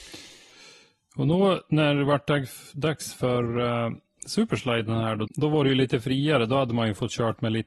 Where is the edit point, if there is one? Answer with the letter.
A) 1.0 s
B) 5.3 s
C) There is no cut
B